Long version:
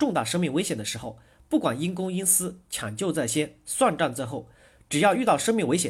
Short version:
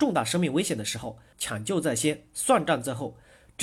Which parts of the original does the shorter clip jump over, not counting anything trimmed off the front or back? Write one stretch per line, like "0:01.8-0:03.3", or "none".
0:01.3-0:02.6

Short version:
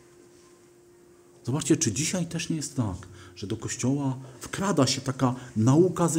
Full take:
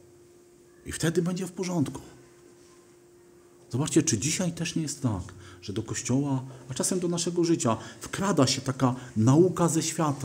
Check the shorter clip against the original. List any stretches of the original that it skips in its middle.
0:06.6-0:08.0

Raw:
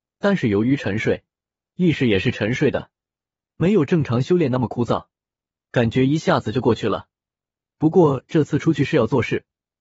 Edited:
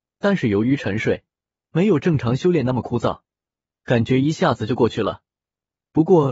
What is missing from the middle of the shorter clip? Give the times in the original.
0:01.6-0:03.5

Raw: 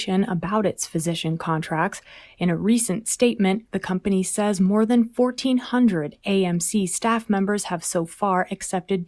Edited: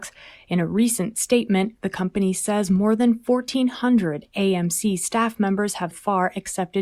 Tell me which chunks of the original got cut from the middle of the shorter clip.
0:07.8-0:08.1

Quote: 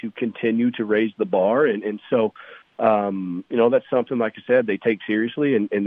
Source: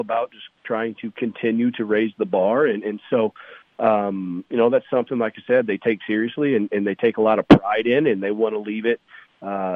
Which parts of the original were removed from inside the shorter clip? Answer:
none

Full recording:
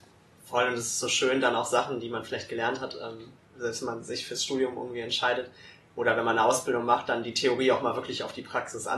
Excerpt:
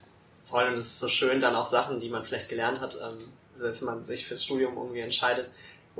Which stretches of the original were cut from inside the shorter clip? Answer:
none

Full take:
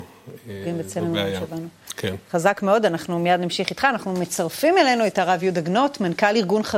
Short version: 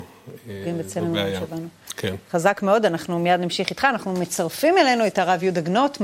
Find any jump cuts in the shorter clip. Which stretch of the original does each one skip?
none

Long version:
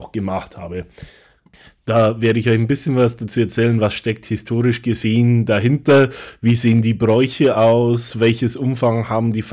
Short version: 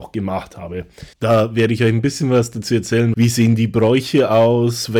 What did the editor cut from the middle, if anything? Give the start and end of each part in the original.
0:01.1-0:01.8
0:03.8-0:06.4

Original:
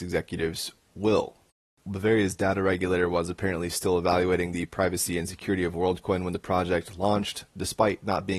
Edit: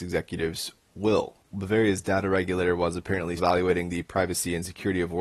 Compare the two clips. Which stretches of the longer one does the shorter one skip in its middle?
0:01.4-0:01.7
0:03.7-0:04.0

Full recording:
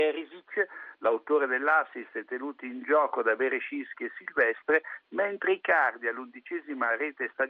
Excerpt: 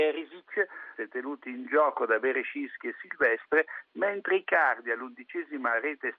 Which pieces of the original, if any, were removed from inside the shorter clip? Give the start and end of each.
0:00.9-0:02.1

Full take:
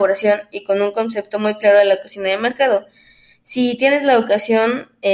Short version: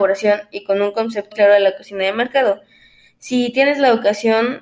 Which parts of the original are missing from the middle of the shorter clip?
0:01.3-0:01.6

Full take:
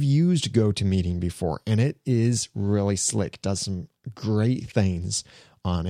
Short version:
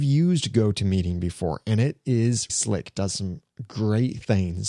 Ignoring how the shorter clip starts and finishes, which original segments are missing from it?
0:02.5-0:03.0

